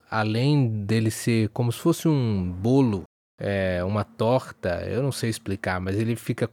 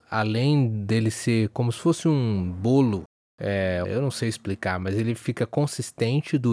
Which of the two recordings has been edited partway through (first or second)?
second